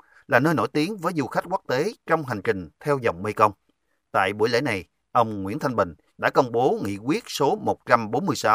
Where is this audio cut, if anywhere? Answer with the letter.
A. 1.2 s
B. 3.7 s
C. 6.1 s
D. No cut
C